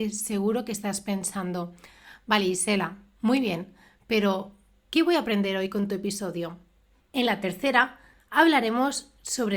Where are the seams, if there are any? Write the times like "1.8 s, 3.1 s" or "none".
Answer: 7.0 s